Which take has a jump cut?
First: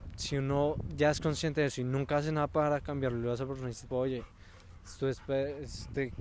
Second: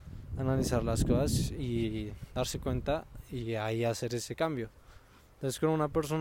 first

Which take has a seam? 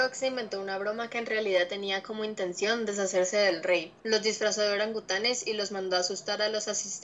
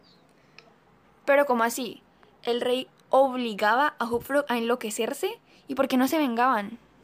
first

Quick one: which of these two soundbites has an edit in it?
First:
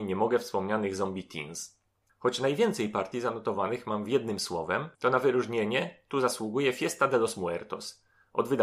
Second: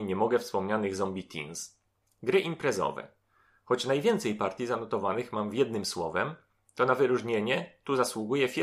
first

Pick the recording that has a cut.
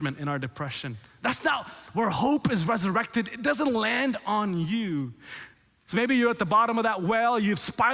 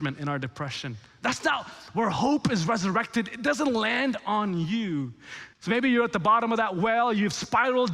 second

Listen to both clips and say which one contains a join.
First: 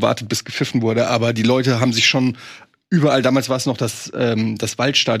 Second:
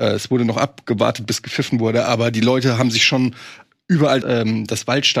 second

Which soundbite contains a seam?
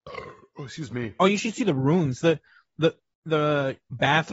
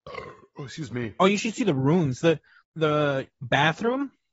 second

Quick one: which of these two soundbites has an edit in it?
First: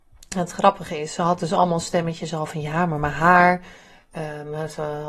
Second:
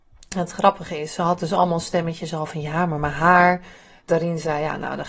second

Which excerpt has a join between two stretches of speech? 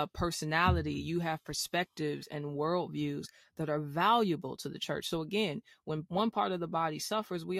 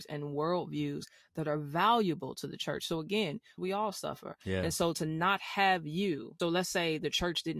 second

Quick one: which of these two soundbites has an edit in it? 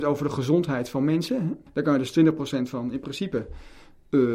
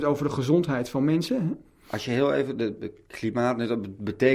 first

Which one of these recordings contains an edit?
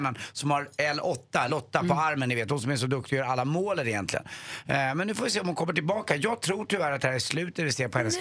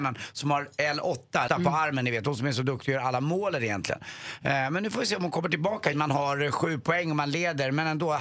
second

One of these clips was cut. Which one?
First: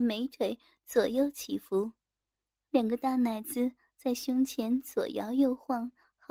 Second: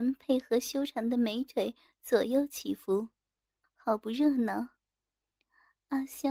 second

